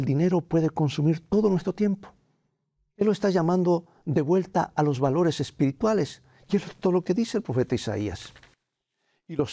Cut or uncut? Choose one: cut